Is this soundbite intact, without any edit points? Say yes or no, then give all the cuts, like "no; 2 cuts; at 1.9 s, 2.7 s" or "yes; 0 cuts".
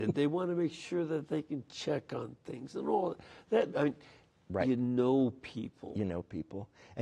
no; 1 cut; at 3.7 s